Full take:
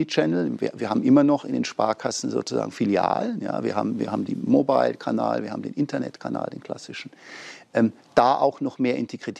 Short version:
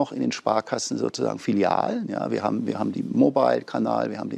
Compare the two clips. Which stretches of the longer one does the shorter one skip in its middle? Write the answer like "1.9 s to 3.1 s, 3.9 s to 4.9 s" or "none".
none